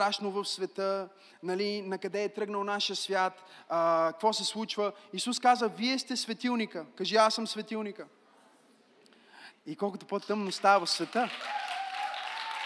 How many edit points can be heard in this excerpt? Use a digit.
1